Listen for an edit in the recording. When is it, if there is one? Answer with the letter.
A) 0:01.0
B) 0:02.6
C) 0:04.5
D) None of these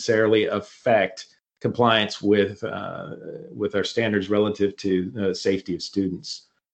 D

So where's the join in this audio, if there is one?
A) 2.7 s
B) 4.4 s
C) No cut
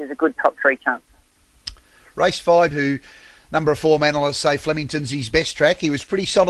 A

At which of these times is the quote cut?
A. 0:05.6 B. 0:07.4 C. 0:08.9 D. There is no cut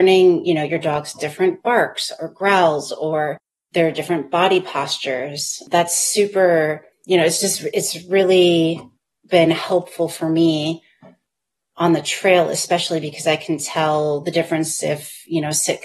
D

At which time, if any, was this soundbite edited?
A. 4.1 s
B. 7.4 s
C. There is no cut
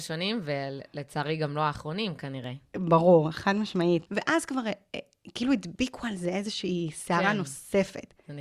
A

